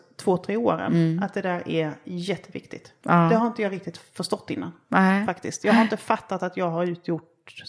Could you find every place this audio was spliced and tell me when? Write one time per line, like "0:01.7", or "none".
none